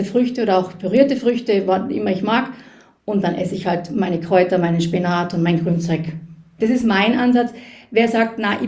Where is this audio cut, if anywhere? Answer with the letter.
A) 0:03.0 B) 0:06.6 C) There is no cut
B